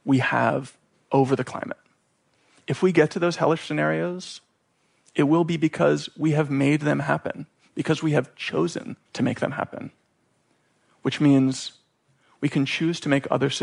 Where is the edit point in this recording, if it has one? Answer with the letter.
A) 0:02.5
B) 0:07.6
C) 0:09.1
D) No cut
C